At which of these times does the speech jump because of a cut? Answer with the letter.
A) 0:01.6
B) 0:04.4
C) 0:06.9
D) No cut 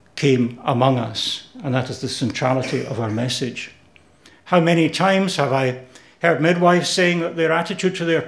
D